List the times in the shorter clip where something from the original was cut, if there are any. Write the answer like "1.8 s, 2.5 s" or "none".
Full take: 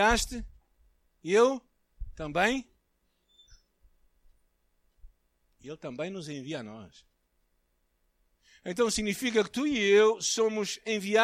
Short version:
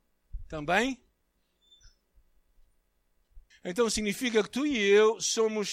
3.5 s